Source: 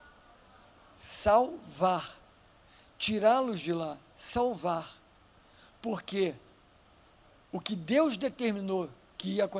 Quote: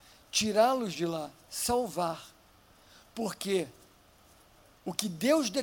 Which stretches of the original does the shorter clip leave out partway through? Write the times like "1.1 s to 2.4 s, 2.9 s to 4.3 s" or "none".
none